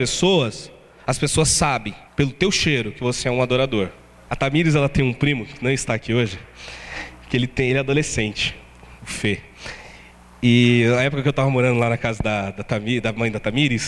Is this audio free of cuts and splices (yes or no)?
no